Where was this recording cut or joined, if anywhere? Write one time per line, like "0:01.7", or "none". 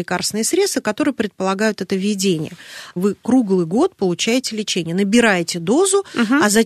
0:03.0